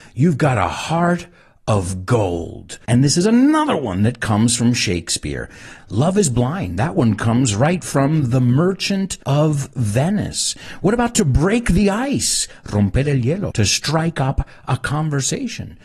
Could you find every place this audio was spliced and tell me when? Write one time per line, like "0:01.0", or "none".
0:02.8
0:05.8
0:13.5